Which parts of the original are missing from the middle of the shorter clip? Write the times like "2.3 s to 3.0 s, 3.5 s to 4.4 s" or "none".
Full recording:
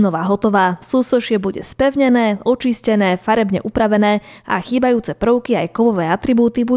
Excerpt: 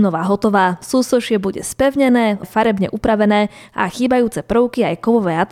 2.4 s to 3.1 s